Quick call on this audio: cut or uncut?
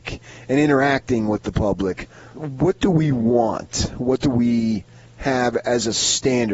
cut